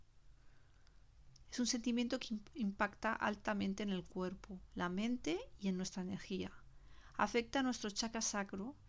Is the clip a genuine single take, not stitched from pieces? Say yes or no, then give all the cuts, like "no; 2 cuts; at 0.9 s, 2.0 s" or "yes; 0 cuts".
no; 1 cut; at 1.4 s